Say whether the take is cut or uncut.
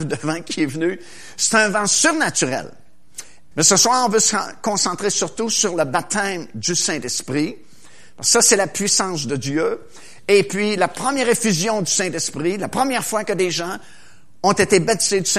cut